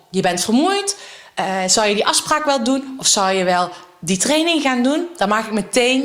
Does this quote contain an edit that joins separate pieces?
no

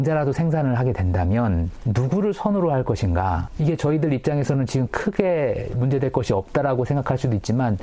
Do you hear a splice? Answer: yes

